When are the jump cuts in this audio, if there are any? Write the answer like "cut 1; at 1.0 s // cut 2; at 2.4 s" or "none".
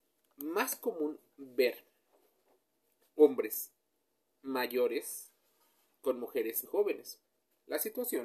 cut 1; at 6.7 s

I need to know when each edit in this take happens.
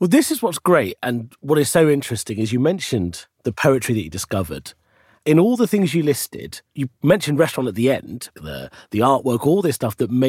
cut 1; at 3.3 s // cut 2; at 8.3 s

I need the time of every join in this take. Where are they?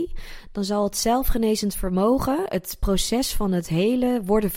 none

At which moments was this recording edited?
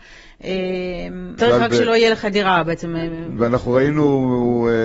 cut 1; at 1.4 s // cut 2; at 3.4 s

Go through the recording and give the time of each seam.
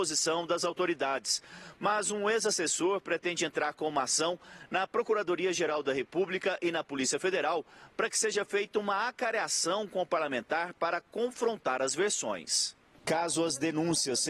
none

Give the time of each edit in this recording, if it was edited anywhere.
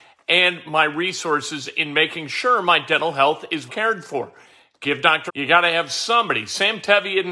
cut 1; at 3.7 s // cut 2; at 5.3 s

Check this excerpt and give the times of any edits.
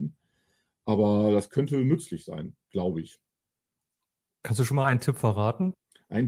none

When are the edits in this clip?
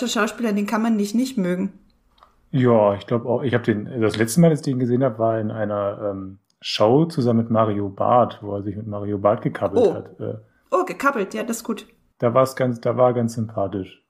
none

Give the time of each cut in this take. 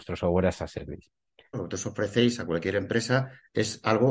cut 1; at 1.5 s

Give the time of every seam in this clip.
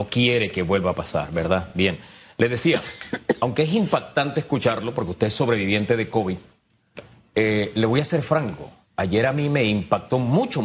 none

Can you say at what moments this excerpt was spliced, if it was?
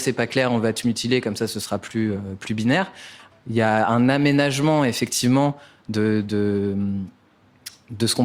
cut 1; at 3.3 s

